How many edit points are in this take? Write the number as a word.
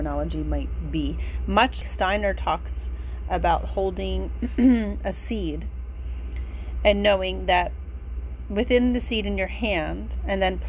one